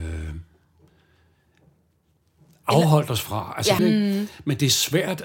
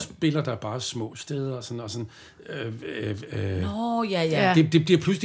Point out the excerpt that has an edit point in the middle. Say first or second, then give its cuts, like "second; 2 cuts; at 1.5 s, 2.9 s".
first; 1 cut; at 3.8 s